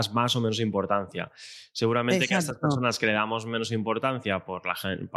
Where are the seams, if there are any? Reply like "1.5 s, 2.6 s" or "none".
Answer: none